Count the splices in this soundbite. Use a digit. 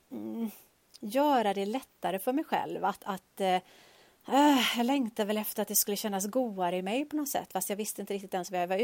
0